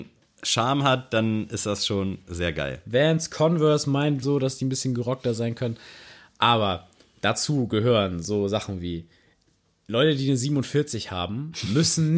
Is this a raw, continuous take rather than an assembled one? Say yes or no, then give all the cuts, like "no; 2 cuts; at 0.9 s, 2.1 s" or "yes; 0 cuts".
no; 1 cut; at 4.2 s